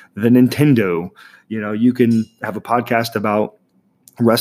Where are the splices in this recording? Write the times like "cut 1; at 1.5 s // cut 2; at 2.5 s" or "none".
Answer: none